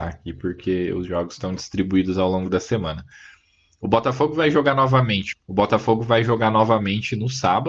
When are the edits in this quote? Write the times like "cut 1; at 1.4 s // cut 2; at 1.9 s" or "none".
cut 1; at 5.3 s